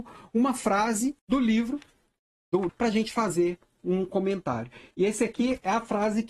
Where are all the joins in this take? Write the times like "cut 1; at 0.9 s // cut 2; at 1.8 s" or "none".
cut 1; at 1.2 s // cut 2; at 2.7 s